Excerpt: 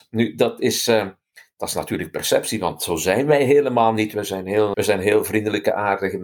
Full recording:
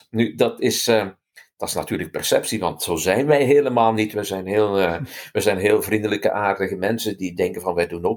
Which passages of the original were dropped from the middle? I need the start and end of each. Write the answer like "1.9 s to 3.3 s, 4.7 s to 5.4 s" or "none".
4.7 s to 5.3 s